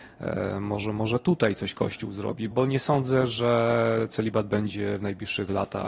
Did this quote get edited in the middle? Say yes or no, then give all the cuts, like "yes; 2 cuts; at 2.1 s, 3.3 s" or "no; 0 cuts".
yes; 1 cut; at 2.5 s